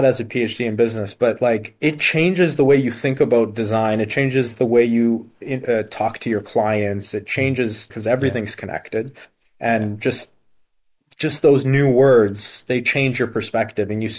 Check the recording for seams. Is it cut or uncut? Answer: cut